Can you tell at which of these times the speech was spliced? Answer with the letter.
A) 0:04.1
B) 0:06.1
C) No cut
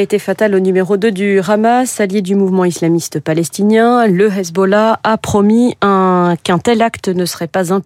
C